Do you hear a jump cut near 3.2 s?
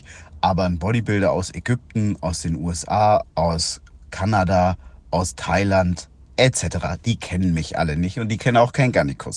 yes; 1 cut; at 3.2 s

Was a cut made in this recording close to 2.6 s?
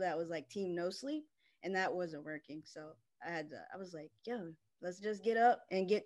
no; 0 cuts

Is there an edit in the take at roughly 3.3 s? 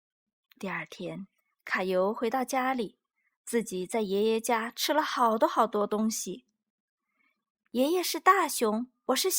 yes; 1 cut; at 3.3 s

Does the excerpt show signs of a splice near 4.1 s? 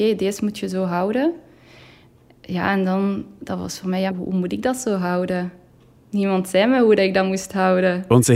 yes; 1 cut; at 4.1 s

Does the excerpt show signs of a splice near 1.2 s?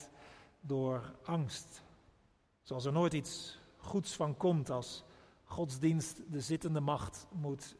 no; 1 cut; at 2.5 s

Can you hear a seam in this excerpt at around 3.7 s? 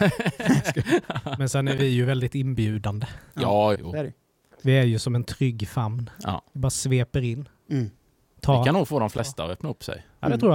yes; 1 cut; at 3.7 s

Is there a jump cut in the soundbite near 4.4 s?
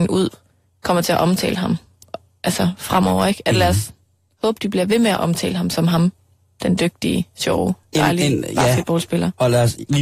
no; 0 cuts

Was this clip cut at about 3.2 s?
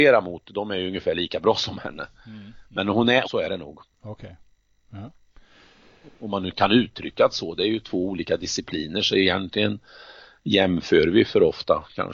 yes; 1 cut; at 3.2 s

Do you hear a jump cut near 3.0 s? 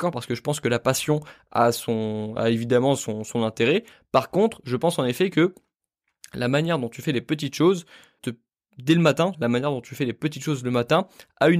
no; 2 cuts; at 8.2 s, 9.3 s

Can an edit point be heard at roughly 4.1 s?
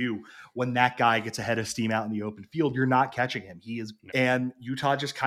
yes; 1 cut; at 4.1 s

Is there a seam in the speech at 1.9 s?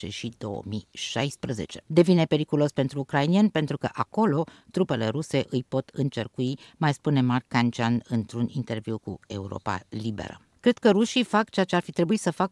yes; 2 cuts; at 1.9 s, 10.6 s

